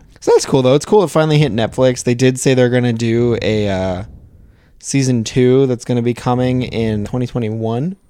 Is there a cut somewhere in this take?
yes; 1 cut; at 7.0 s

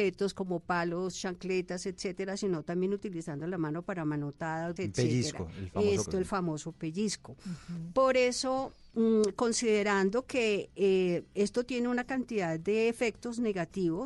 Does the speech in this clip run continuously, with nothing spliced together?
no; 2 cuts; at 4.8 s, 6.1 s

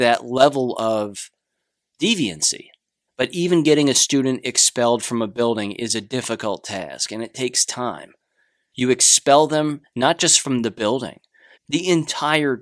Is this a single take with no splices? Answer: no; 3 cuts; at 3.1 s, 8.7 s, 11.6 s

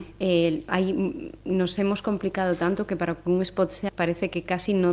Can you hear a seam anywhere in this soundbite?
yes; 1 cut; at 3.9 s

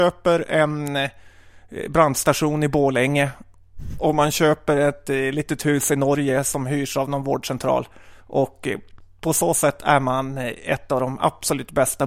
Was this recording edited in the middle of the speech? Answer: no; 0 cuts

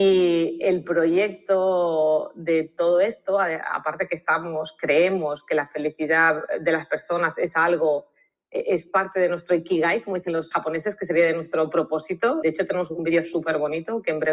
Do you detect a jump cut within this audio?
yes; 2 cuts; at 10.5 s, 12.4 s

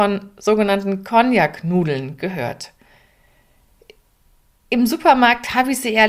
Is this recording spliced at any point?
no; 0 cuts

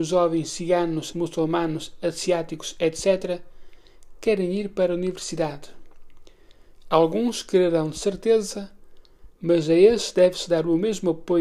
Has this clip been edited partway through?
yes; 1 cut; at 1.1 s

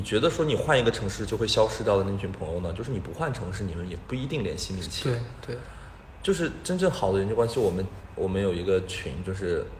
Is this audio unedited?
yes; 0 cuts

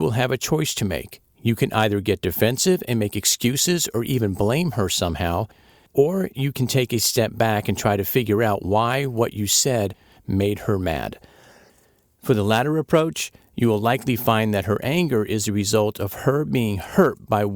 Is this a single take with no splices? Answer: yes; 0 cuts

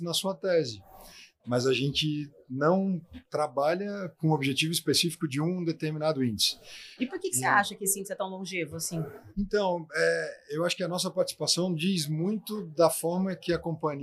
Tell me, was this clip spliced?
yes; 2 cuts; at 1.4 s, 7.0 s

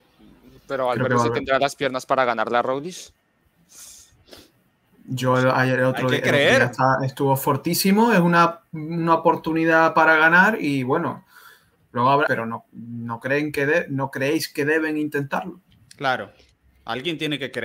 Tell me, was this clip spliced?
yes; 1 cut; at 12.3 s

